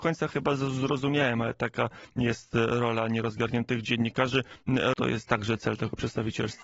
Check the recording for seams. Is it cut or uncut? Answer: cut